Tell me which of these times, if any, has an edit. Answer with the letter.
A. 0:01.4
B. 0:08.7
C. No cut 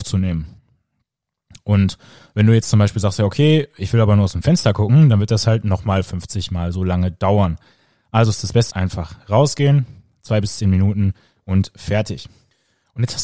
B